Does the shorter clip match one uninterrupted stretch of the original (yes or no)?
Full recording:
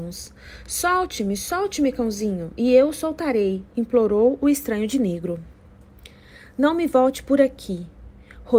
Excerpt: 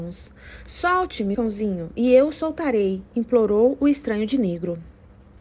no